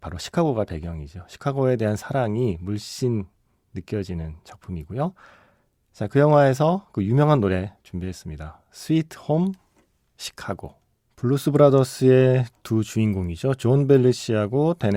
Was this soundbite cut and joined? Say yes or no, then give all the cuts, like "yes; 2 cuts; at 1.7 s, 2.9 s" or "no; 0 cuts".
no; 0 cuts